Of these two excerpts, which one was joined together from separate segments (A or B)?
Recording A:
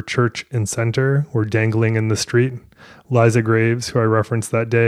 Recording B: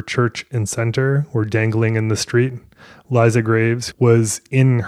B